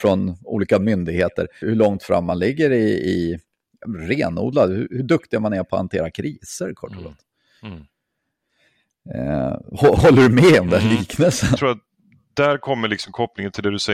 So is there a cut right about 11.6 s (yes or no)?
yes